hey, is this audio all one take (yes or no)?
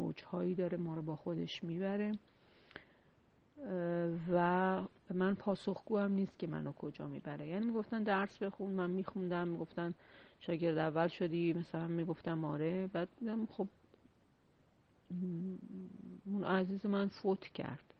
no